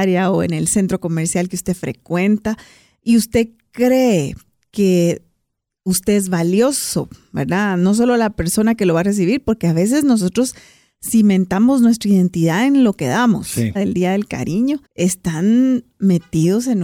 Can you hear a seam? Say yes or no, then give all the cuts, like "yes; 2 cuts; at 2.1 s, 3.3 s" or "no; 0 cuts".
yes; 2 cuts; at 13.8 s, 14.8 s